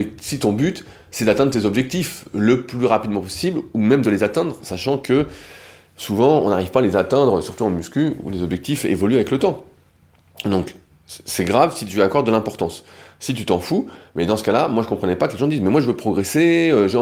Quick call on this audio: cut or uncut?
uncut